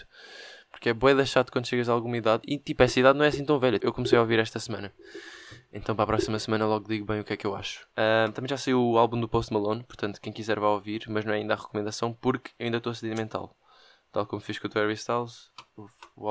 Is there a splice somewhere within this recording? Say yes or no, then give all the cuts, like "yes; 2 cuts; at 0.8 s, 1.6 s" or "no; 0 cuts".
yes; 2 cuts; at 3.8 s, 7.9 s